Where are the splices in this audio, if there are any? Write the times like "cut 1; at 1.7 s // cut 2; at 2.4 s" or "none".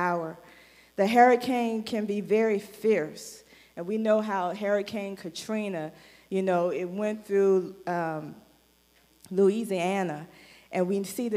none